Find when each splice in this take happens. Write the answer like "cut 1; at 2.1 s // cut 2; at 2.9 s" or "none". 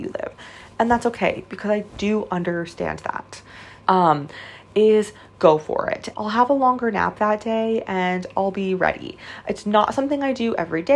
cut 1; at 3.8 s // cut 2; at 6.1 s